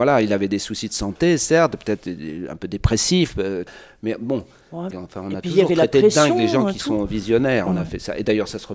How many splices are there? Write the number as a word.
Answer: two